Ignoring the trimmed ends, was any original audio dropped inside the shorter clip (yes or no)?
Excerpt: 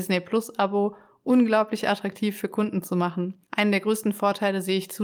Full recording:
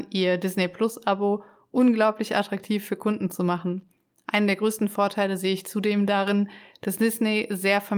yes